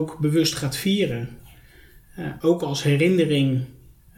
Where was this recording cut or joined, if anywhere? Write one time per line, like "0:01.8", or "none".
none